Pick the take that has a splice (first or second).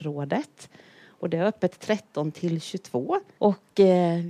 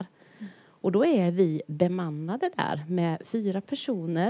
first